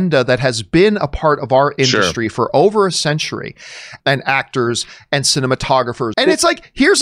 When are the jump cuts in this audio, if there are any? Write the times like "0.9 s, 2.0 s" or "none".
4.0 s, 6.1 s